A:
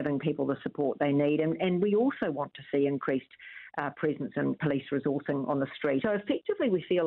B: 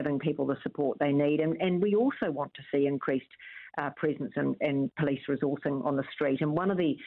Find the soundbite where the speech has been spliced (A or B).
A